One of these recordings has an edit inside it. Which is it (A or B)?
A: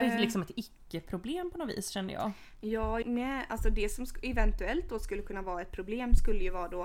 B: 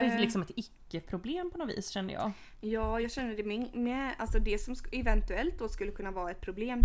A